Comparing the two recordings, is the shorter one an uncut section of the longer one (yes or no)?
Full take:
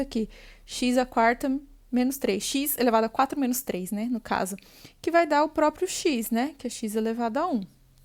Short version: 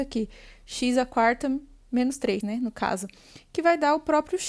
no